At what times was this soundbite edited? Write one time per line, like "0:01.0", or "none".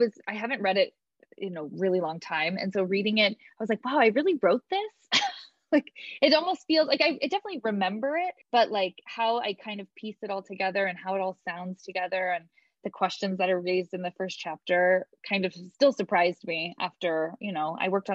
0:08.4
0:15.7